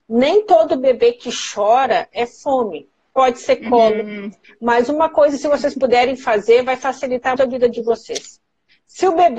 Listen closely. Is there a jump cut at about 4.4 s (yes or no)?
yes